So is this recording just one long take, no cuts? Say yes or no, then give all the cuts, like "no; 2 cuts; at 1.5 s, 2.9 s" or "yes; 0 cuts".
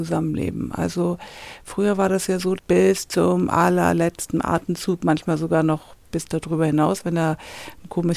no; 2 cuts; at 2.6 s, 6.0 s